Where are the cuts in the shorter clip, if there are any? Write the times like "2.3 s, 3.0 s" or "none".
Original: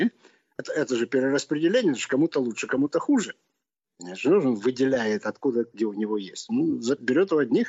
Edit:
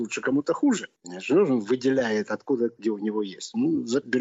1.0 s